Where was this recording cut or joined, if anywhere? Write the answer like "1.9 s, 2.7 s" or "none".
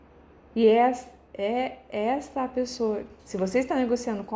3.2 s